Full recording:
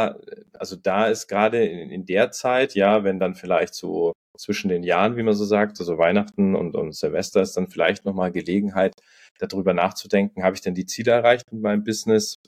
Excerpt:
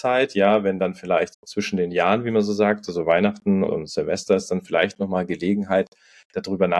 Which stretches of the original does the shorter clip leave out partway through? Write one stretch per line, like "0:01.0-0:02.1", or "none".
0:03.7-0:04.2
0:06.6-0:06.7